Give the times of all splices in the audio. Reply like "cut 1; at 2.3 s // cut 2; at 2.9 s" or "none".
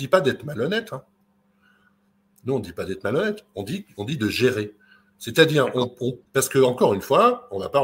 none